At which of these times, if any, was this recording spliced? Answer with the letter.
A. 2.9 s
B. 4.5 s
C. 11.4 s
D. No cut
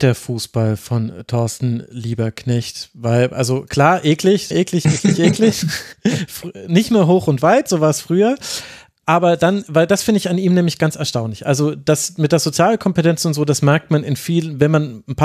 B